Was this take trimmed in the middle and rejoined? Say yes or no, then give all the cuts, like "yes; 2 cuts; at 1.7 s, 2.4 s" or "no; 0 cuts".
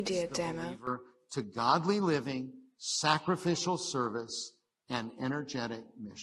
no; 0 cuts